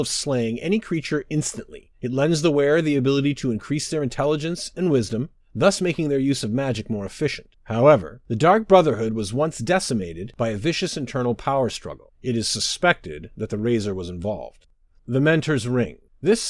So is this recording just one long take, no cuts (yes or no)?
no